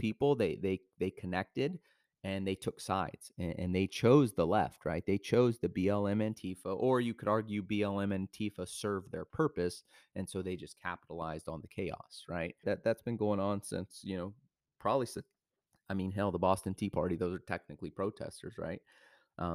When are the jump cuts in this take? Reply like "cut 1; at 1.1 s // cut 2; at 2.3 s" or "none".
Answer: cut 1; at 12.6 s